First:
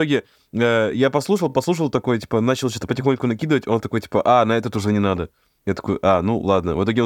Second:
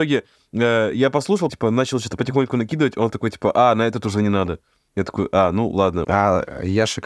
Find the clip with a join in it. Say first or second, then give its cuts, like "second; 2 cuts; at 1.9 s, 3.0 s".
second; 2 cuts; at 1.5 s, 6.0 s